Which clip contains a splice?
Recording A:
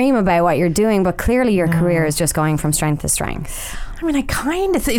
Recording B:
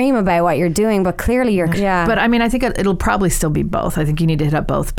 B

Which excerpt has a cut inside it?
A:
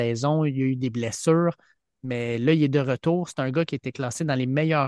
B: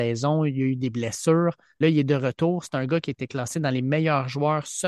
B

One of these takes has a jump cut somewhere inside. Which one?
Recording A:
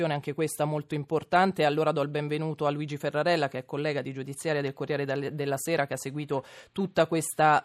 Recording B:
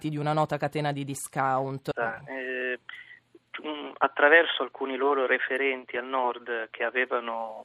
B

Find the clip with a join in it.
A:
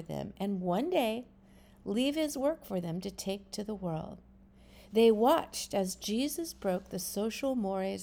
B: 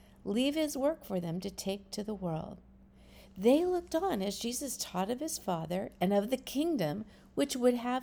A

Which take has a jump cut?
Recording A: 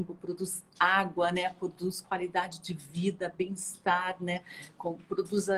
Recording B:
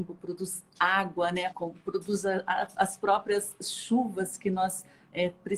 B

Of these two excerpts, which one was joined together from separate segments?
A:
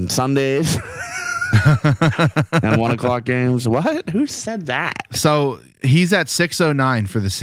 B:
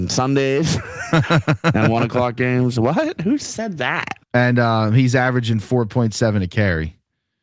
B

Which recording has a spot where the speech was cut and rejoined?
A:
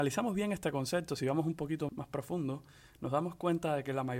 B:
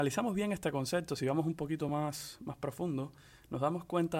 A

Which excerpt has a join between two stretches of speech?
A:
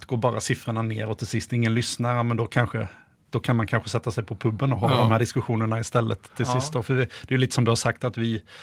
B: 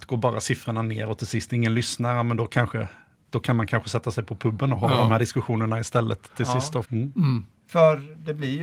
B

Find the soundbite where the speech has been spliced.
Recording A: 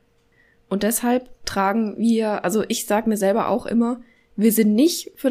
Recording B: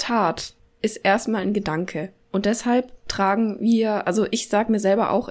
B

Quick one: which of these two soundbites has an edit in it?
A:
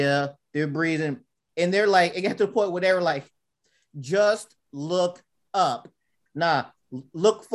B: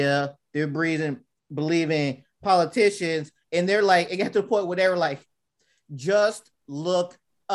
A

